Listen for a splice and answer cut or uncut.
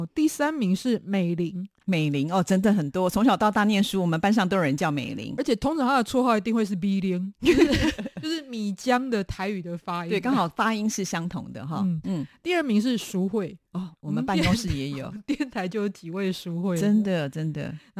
uncut